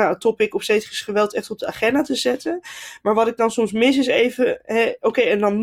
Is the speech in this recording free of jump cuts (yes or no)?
yes